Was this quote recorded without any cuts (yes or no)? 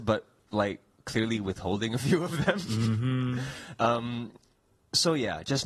yes